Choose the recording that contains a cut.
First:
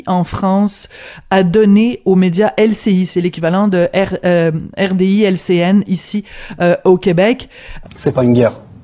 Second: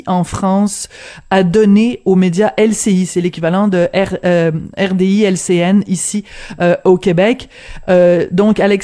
first; 1 cut; at 7.8 s

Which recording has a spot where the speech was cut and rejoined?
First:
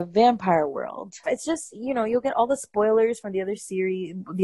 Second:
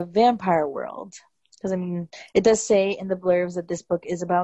first; 1 cut; at 1.2 s

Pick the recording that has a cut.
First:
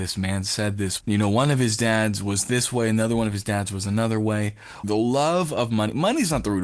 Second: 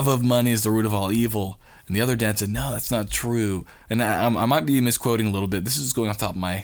first; 2 cuts; at 1.0 s, 4.8 s

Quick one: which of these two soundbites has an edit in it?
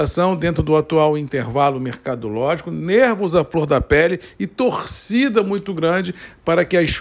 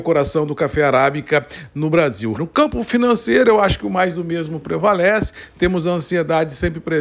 second; 1 cut; at 2.3 s

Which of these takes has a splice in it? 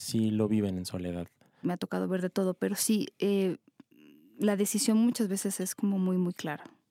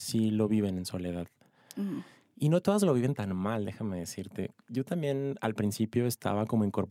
first; 1 cut; at 1.6 s

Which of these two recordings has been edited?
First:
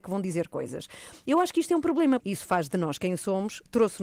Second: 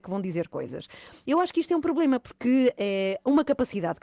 first; 1 cut; at 2.2 s

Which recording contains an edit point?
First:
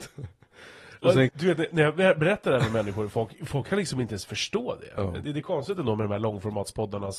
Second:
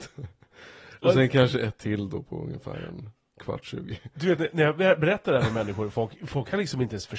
first; 1 cut; at 1.3 s

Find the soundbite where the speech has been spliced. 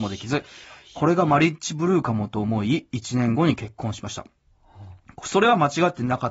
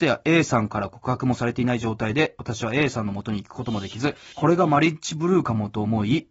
second; 1 cut; at 4.3 s

